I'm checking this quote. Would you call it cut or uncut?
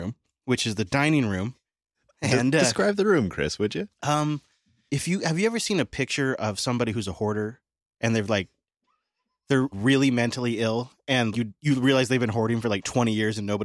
cut